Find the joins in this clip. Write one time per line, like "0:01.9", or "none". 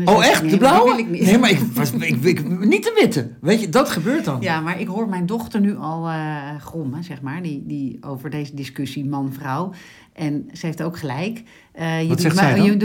none